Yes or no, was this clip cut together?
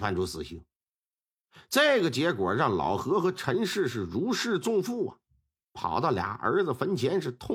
no